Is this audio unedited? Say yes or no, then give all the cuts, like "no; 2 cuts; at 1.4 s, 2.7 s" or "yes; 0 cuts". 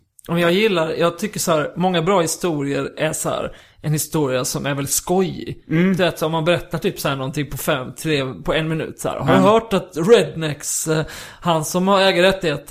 yes; 0 cuts